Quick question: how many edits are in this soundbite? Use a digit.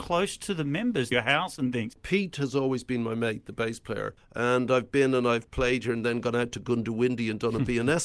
2